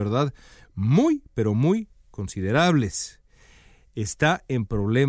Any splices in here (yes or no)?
no